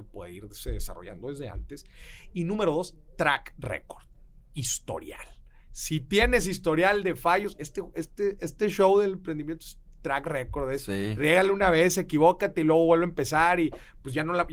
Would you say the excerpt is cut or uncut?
uncut